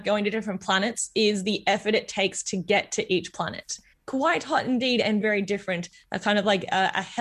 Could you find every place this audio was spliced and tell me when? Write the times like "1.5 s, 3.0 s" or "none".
3.9 s, 5.2 s